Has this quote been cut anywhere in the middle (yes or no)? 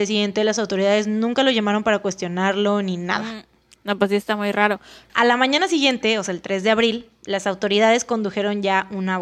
no